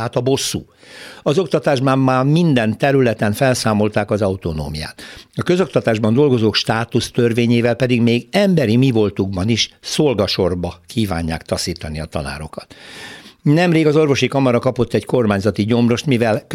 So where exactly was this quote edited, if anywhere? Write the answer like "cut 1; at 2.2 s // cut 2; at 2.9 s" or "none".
cut 1; at 1.2 s